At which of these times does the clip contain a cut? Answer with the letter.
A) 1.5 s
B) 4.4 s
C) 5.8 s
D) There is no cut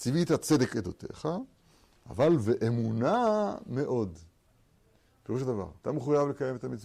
C